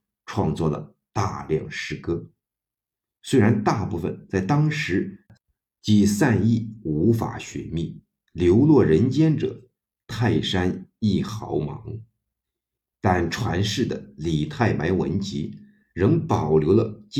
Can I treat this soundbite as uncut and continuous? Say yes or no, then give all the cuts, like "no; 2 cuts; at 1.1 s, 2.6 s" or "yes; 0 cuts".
yes; 0 cuts